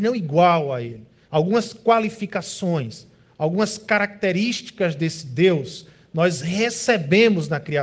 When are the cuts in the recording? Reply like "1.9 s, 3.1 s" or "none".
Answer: 1.3 s